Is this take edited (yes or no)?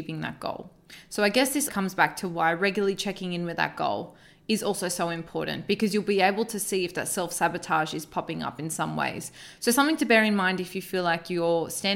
yes